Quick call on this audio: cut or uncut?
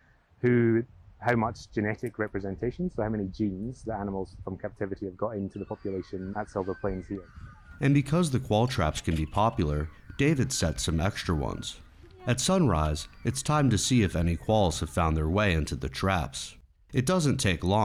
uncut